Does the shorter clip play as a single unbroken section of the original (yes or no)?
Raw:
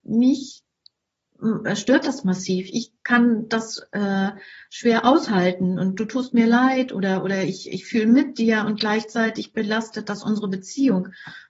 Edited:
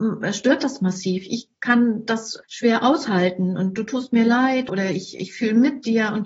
no